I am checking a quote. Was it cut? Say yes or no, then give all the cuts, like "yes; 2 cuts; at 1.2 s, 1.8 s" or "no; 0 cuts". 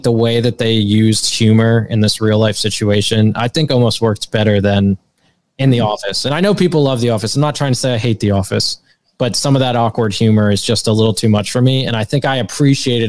no; 0 cuts